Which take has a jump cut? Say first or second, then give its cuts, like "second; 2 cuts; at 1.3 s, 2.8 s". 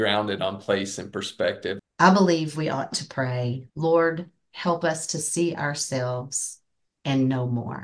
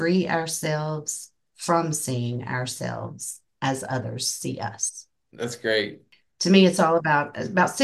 first; 2 cuts; at 1.8 s, 3.7 s